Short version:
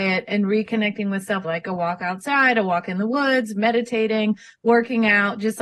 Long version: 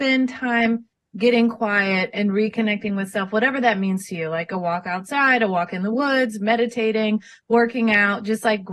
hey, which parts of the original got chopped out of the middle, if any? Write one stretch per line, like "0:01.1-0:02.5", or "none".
0:03.3-0:04.3

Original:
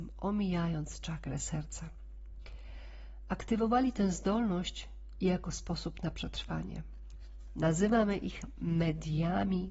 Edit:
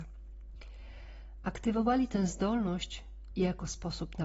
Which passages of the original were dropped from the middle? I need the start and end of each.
none

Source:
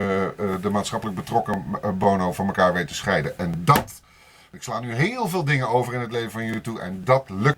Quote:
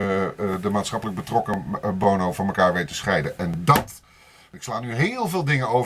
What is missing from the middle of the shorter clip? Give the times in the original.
none

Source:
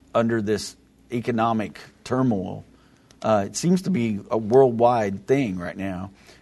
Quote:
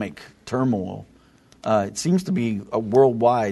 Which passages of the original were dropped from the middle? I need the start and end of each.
none

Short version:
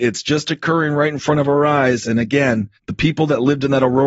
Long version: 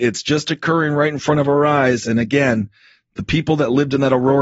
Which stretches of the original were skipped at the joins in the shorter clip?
0:02.8-0:03.1

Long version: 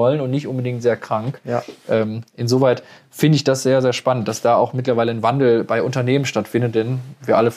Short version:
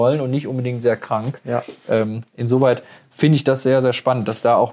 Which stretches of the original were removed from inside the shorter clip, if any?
none

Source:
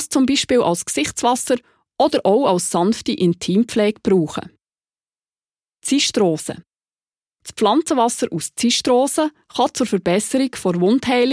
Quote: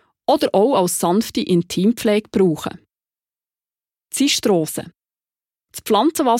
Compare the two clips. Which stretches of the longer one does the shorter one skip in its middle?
none

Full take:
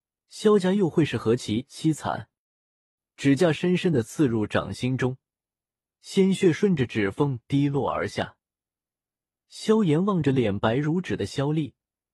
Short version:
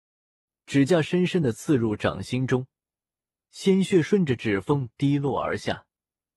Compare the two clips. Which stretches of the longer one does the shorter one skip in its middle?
none

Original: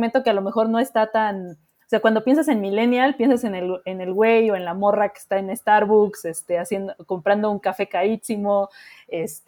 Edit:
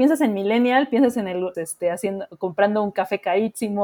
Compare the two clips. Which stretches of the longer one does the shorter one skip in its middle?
0:03.8-0:06.2

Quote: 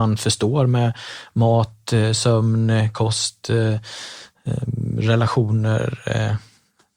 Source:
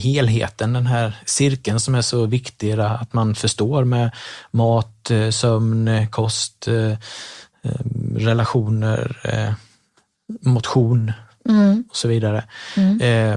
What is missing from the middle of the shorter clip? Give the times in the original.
none

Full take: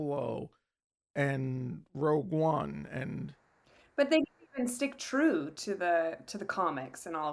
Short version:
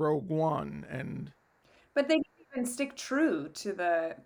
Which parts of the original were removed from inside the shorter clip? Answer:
none

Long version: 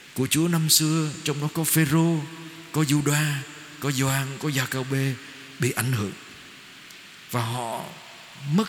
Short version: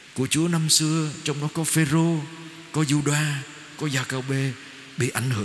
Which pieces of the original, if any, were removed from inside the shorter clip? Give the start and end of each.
0:03.8-0:04.4

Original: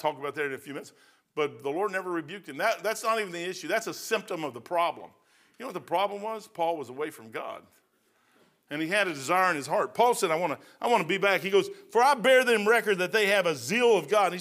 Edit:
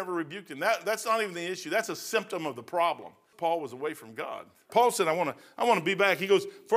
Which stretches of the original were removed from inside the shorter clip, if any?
0:05.3-0:06.5
0:07.9-0:09.9

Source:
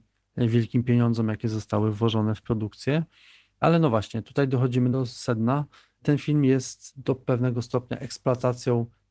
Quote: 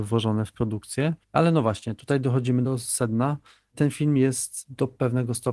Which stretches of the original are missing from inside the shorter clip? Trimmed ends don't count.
0:03.1-0:03.5

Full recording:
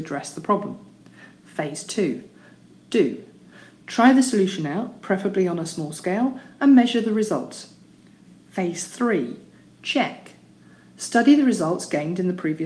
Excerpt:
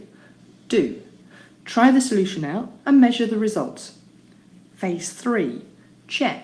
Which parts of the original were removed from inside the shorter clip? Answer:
0:05.0-0:06.5

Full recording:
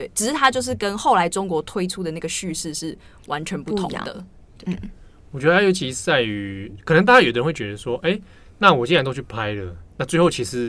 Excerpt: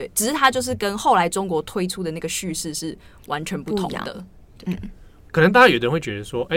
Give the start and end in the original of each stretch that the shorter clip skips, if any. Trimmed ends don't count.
0:05.3-0:06.8

